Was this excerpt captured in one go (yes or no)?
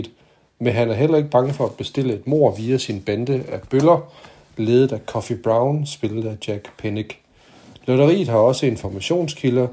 yes